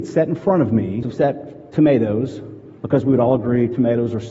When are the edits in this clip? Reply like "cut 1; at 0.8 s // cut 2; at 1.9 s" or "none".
cut 1; at 1.0 s // cut 2; at 2.8 s